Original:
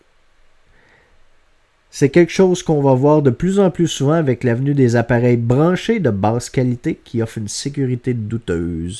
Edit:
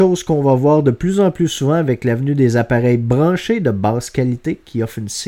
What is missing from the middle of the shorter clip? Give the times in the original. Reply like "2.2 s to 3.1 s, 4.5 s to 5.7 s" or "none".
none